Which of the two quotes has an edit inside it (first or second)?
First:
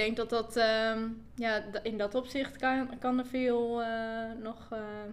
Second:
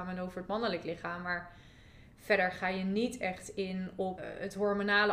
second